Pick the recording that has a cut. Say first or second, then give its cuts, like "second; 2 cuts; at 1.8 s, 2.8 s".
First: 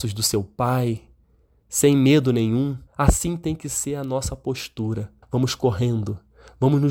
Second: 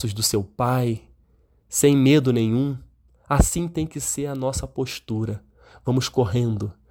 first; 2 cuts; at 2.9 s, 5.2 s